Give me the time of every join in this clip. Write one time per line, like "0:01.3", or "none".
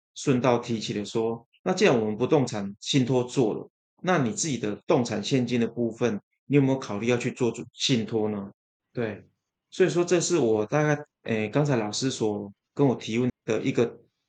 0:08.8
0:11.1
0:13.3